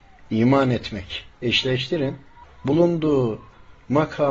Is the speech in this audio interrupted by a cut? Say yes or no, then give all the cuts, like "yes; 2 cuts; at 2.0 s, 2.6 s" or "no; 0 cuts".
no; 0 cuts